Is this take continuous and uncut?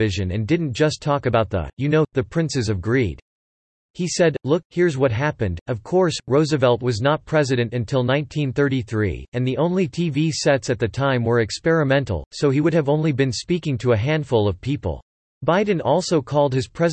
no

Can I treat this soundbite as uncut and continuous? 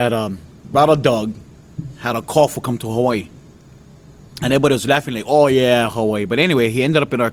yes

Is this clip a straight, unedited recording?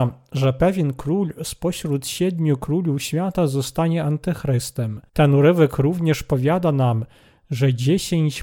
no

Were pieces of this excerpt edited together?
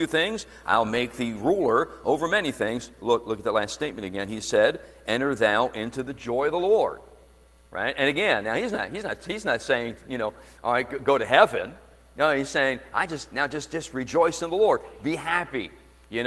no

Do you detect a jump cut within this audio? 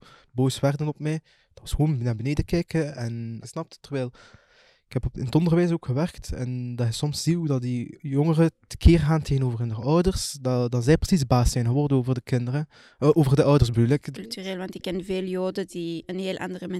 yes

